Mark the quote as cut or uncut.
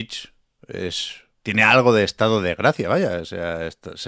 cut